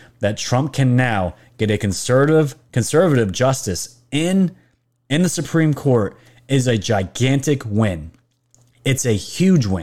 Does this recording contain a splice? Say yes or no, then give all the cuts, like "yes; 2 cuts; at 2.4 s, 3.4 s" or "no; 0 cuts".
no; 0 cuts